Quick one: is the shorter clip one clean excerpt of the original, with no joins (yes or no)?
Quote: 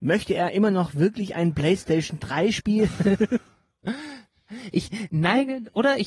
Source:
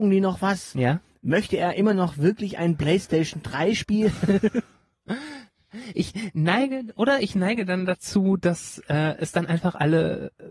yes